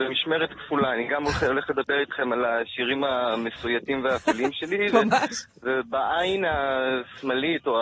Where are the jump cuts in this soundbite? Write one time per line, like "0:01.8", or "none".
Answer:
none